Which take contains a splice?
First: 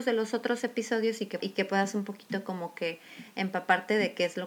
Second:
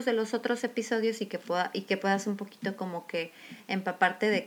first; 1 cut; at 1.4 s

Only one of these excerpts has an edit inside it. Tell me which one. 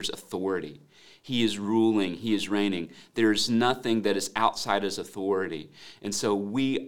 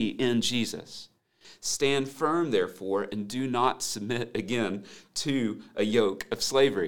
second; 1 cut; at 1.4 s

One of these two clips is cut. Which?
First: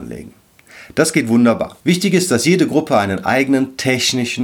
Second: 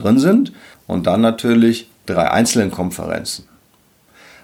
first; 1 cut; at 1.8 s

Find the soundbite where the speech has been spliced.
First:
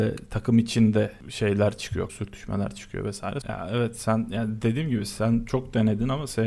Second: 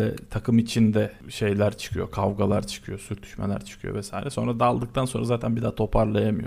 first; 2 cuts; at 2.1 s, 3.4 s

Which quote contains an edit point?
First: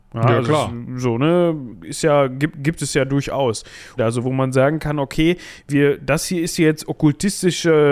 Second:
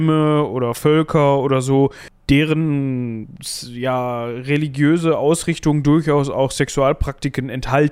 first; 1 cut; at 4.0 s

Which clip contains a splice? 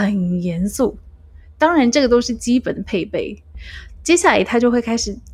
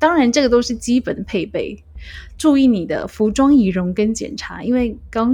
second; 1 cut; at 2.4 s

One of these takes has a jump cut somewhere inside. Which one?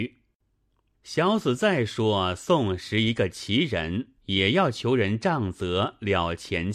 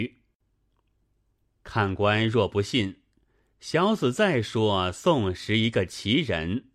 first; 2 cuts; at 0.9 s, 4.2 s

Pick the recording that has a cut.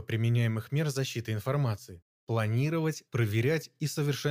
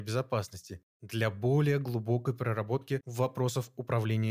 first; 1 cut; at 3.1 s

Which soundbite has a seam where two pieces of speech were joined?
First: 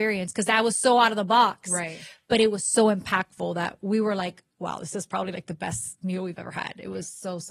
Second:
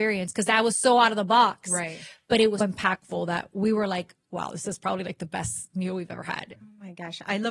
second; 2 cuts; at 2.6 s, 6.5 s

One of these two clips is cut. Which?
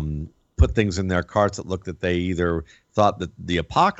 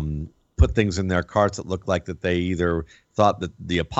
first; 1 cut; at 1.8 s

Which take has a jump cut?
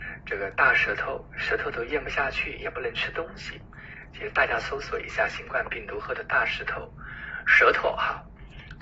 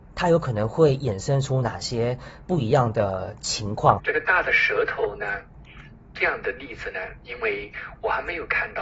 second; 2 cuts; at 4.0 s, 7.2 s

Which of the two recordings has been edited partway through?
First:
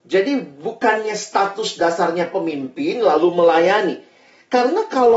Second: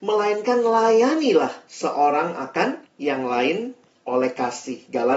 second; 1 cut; at 2.9 s

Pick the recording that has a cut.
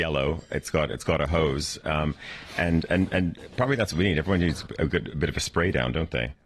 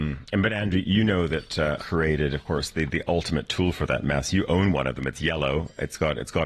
second; 1 cut; at 1.8 s

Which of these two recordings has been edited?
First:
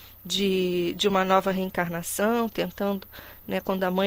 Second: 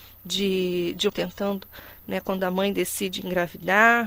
second; 1 cut; at 1.1 s

